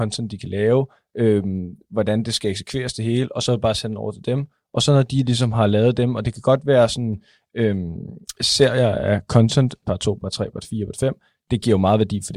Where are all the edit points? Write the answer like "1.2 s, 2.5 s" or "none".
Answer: 9.8 s